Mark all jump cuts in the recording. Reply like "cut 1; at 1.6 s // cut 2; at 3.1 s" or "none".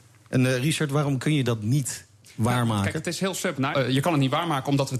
cut 1; at 3.7 s

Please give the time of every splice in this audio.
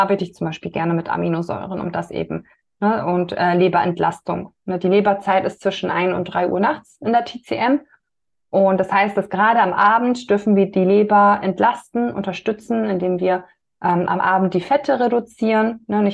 none

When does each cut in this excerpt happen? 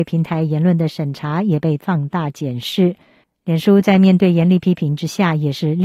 cut 1; at 3.2 s

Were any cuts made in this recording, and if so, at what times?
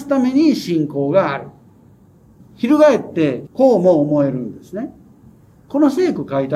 cut 1; at 2.4 s // cut 2; at 3.5 s

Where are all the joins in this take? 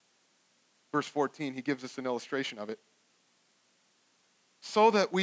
none

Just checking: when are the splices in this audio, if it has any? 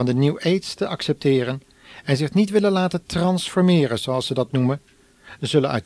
none

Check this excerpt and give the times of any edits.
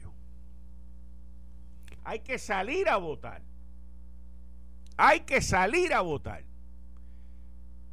cut 1; at 2.0 s

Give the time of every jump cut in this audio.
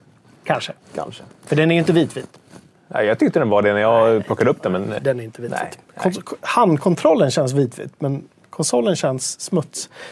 cut 1; at 5.0 s

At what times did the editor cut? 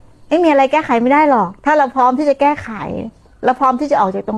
cut 1; at 1.6 s

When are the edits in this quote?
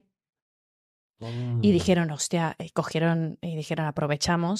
none

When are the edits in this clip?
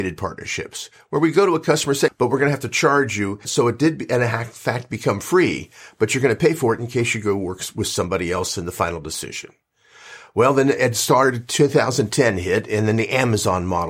cut 1; at 2.1 s // cut 2; at 3.4 s

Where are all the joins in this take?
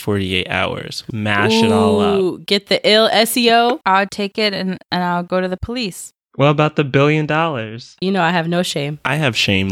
cut 1; at 1.1 s // cut 2; at 3.8 s // cut 3; at 8.0 s

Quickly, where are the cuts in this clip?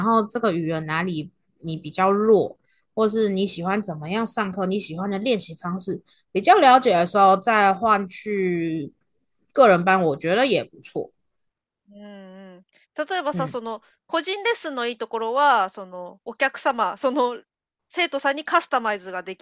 cut 1; at 16.2 s

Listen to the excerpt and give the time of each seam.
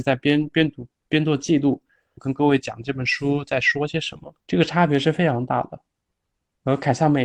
cut 1; at 2.2 s // cut 2; at 4.4 s

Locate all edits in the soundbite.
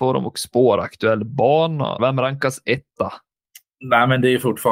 cut 1; at 2.0 s

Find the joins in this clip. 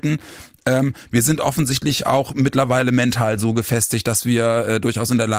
none

